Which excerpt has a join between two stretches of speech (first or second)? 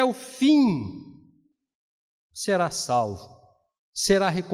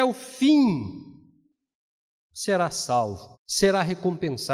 second